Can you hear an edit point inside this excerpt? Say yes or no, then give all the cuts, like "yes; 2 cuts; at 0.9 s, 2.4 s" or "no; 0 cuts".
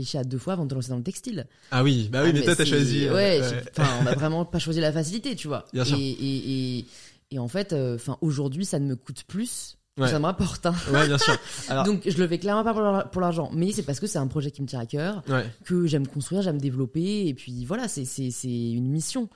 no; 0 cuts